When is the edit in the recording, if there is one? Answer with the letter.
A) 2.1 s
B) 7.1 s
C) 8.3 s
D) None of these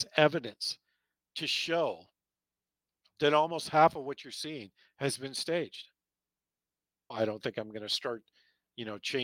B